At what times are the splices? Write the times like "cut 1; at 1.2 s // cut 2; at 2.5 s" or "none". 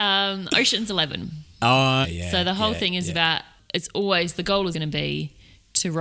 cut 1; at 2.0 s // cut 2; at 4.7 s